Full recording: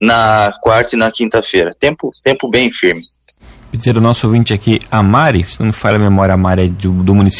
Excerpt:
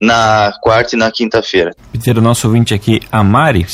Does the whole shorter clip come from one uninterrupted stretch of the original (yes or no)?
no